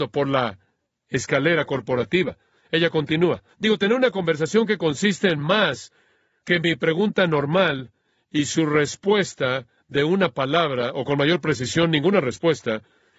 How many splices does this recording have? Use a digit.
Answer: 1